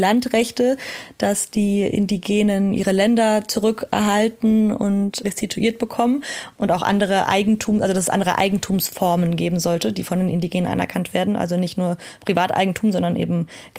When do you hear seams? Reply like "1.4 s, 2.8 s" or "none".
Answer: 2.7 s